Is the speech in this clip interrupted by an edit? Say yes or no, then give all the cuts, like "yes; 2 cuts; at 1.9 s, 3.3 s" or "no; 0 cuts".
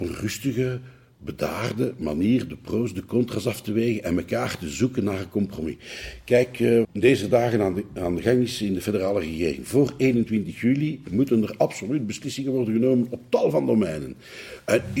yes; 1 cut; at 6.8 s